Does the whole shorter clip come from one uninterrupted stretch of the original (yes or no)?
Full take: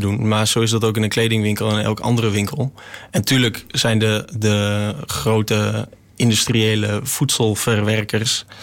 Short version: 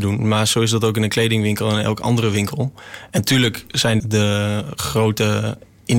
no